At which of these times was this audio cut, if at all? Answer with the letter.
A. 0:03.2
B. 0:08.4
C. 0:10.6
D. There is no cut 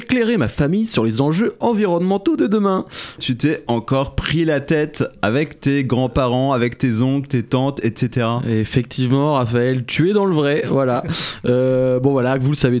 A